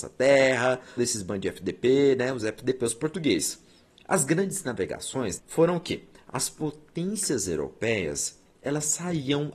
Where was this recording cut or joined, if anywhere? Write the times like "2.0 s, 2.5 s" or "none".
1.0 s, 5.4 s

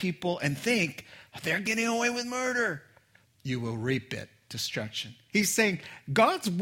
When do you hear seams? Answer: 3.2 s, 5.3 s

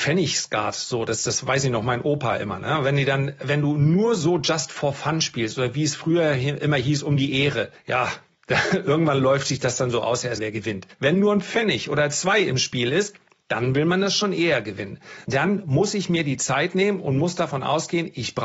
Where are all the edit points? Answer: 10.4 s, 15.2 s

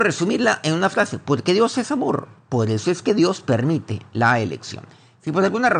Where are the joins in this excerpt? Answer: none

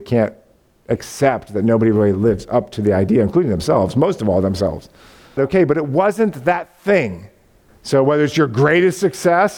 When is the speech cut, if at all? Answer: 5.4 s, 7.7 s

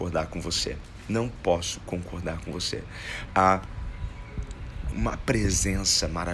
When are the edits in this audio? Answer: 3.3 s, 4.9 s

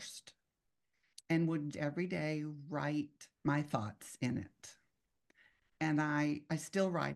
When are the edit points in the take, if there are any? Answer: 1.7 s, 3.4 s

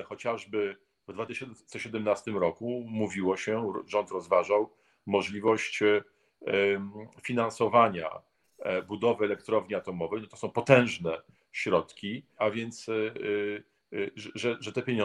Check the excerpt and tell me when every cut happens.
12.4 s

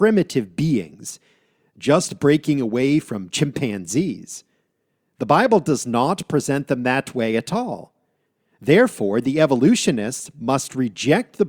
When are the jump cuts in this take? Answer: none

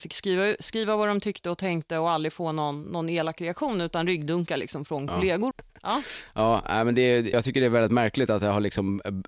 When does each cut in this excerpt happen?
5.5 s, 7.3 s

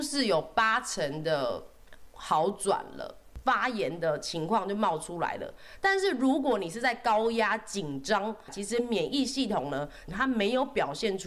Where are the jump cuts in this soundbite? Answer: 3.4 s, 8.5 s, 10.1 s

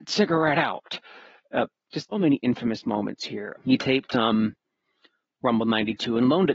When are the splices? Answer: 2.1 s, 3.6 s

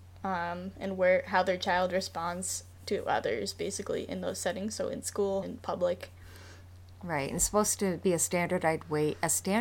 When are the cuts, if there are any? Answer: 5.4 s

